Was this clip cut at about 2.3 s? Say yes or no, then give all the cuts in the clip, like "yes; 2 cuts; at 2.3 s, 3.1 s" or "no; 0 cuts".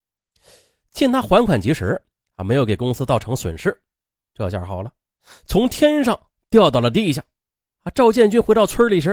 no; 2 cuts; at 4.1 s, 7.7 s